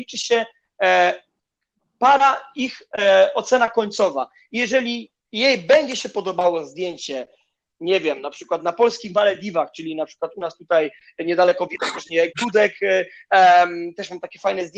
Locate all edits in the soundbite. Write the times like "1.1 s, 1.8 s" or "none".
5.2 s